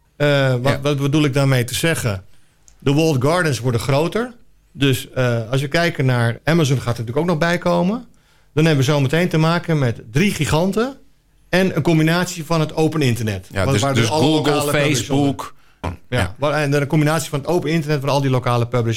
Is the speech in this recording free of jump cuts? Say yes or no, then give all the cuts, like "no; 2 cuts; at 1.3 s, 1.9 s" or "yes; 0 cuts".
no; 2 cuts; at 6.4 s, 15.8 s